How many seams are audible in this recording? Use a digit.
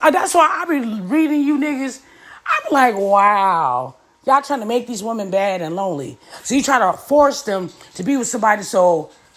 0